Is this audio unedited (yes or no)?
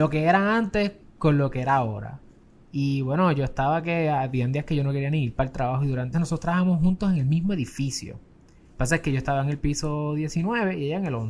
no